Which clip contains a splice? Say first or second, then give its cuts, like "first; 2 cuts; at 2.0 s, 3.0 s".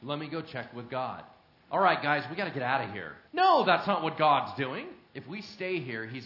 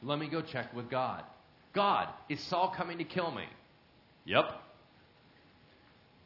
first; 3 cuts; at 1.7 s, 3.3 s, 5.1 s